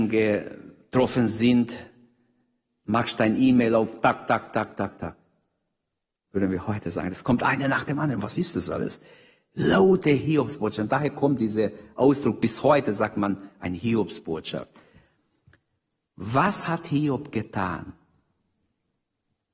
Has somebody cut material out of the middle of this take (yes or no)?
no